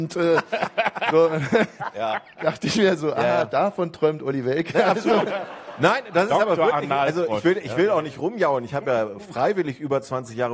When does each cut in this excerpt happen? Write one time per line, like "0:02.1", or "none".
none